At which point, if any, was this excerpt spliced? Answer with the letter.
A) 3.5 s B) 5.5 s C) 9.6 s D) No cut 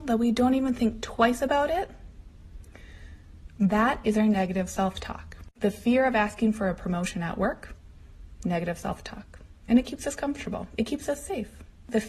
A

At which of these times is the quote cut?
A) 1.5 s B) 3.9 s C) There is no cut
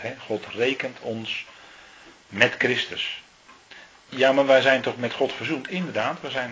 B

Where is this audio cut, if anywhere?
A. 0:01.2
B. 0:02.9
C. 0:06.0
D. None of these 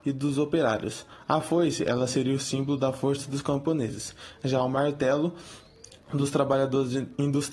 D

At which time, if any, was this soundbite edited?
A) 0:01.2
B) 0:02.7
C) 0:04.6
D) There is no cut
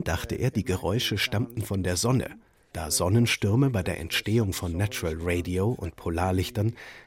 B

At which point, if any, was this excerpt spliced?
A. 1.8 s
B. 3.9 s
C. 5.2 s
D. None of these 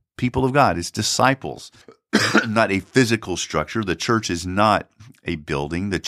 A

